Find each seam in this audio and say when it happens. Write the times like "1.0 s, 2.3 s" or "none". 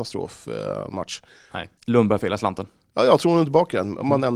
1.8 s